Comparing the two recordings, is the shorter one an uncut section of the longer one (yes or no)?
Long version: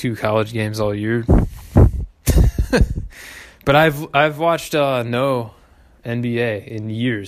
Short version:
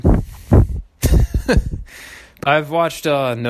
no